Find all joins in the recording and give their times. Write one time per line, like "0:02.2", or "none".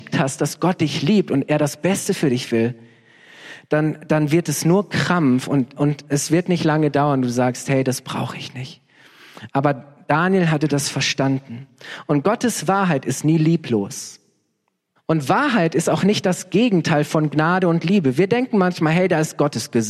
0:15.0

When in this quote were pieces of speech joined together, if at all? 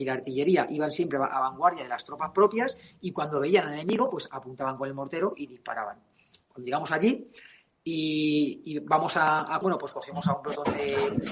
0:06.4
0:09.6

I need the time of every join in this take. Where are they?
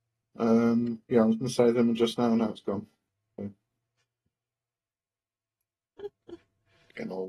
none

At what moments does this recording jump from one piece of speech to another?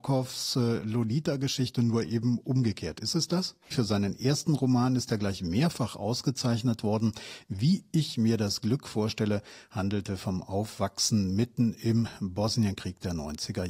0:03.7

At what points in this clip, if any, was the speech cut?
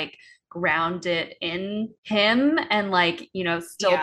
0:02.0

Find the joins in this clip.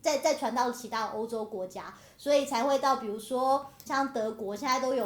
0:03.9

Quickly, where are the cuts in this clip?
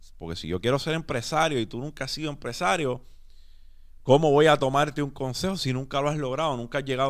none

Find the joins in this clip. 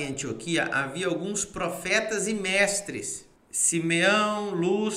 0:03.3

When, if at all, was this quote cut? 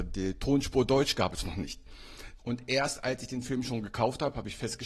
0:02.4

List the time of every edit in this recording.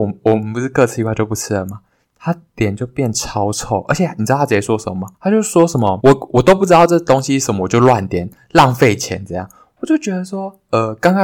none

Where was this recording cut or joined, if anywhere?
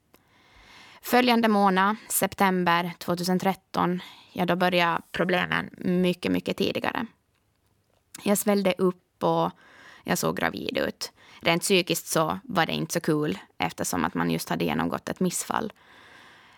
none

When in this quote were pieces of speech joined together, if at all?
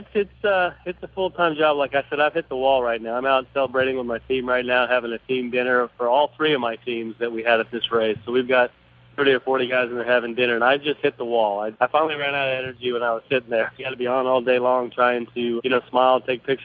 0:11.7
0:13.8
0:15.6

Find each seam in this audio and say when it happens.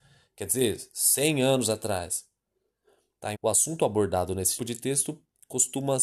0:03.3
0:04.6

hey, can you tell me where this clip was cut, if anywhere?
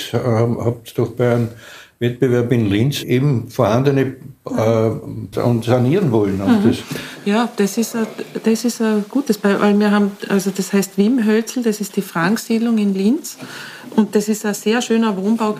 0:05.3

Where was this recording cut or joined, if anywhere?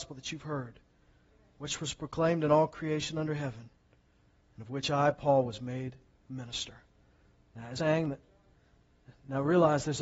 0:07.8

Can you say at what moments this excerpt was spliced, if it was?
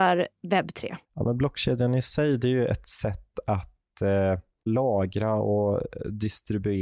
0:01.0

